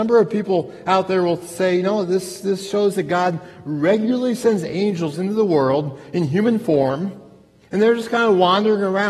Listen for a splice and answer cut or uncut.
uncut